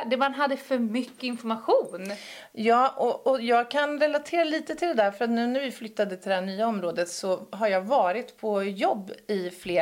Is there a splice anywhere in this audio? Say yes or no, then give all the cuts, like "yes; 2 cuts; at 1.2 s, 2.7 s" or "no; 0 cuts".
no; 0 cuts